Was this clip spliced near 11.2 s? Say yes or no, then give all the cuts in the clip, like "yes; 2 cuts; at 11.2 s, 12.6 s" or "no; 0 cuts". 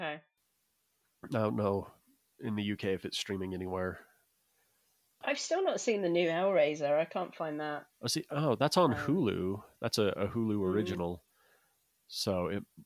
no; 1 cut; at 5.2 s